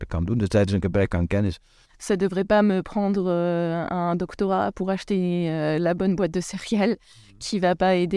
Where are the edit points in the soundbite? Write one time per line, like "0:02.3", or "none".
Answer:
0:01.8